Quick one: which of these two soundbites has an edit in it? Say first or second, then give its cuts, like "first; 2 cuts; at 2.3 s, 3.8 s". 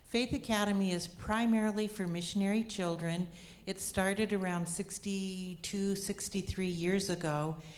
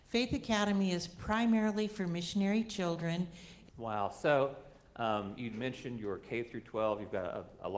second; 1 cut; at 3.7 s